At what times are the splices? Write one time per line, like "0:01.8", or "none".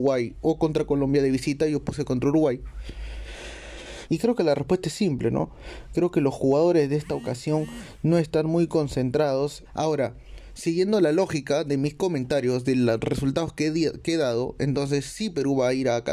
0:04.1
0:09.6